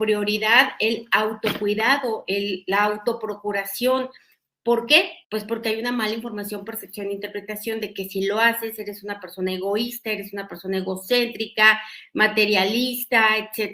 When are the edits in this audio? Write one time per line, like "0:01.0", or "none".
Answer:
0:05.2